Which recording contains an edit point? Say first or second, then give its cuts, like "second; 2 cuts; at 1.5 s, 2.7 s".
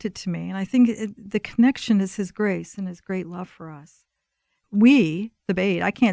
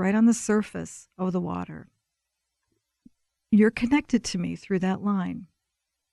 first; 1 cut; at 1.3 s